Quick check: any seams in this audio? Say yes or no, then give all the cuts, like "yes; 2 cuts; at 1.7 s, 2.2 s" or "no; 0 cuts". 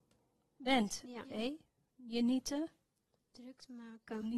yes; 1 cut; at 1.2 s